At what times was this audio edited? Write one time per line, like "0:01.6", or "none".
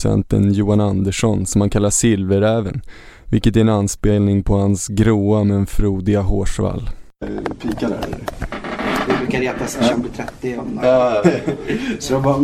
0:09.9
0:11.2